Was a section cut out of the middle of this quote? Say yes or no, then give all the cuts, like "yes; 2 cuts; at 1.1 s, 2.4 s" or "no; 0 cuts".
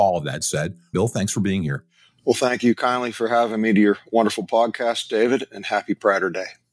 yes; 1 cut; at 0.9 s